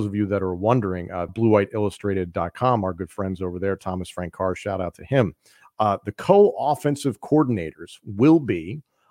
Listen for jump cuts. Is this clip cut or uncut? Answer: cut